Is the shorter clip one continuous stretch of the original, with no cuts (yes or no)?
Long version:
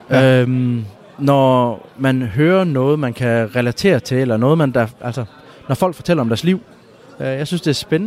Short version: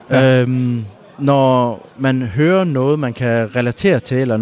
yes